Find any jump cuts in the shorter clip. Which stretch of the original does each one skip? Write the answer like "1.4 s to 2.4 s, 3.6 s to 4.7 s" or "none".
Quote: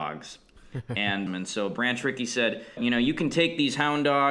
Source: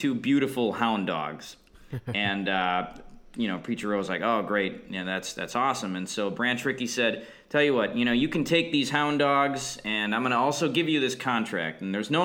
2.4 s to 5.9 s, 7.4 s to 7.9 s